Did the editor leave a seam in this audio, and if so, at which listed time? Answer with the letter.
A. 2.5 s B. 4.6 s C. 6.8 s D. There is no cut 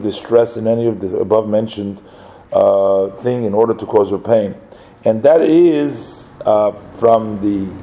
D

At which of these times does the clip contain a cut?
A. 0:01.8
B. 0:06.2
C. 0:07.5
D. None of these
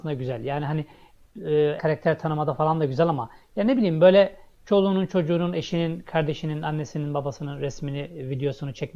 A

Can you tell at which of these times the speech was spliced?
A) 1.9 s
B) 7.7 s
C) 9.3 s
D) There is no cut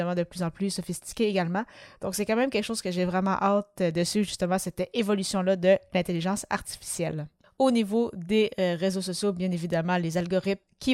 D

